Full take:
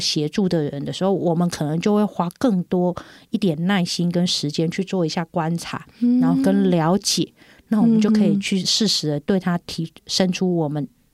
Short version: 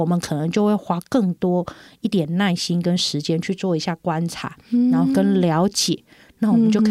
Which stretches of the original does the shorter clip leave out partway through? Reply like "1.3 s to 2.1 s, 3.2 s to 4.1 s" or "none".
none